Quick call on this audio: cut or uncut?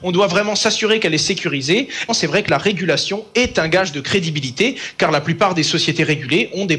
cut